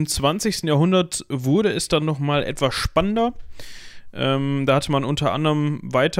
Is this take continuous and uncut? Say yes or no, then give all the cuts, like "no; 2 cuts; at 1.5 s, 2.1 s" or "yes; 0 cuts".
yes; 0 cuts